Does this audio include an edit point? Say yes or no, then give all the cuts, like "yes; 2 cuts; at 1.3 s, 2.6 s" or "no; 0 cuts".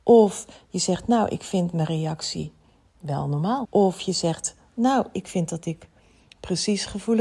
yes; 1 cut; at 3.6 s